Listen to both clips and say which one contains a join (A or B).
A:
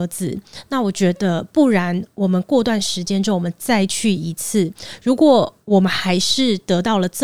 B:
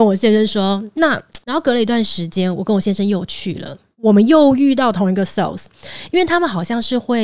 B